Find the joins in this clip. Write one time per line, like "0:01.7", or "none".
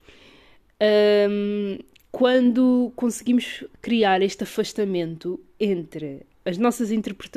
none